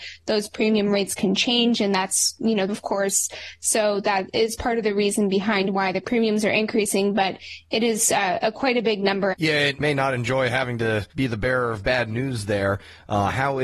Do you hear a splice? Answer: yes; 3 cuts; at 2.7 s, 9.3 s, 11.1 s

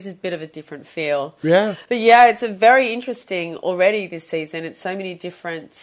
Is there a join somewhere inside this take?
no; 0 cuts

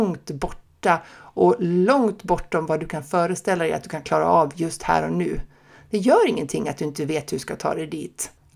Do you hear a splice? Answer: no; 0 cuts

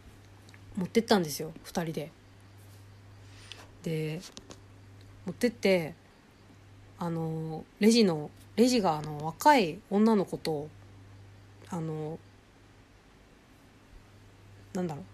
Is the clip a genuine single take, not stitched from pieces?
yes; 0 cuts

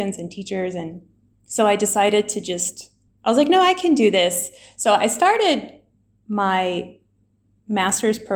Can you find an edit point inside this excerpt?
no; 0 cuts

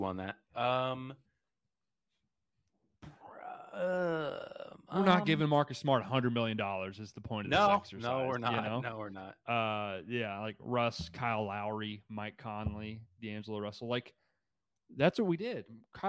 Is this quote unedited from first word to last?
yes; 0 cuts

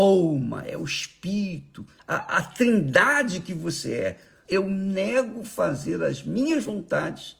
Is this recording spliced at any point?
yes; 2 cuts; at 2.0 s, 4.4 s

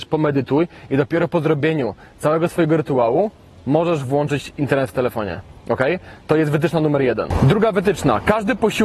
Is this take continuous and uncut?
yes; 0 cuts

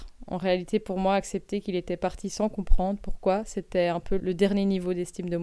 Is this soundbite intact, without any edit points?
no; 1 cut; at 4.2 s

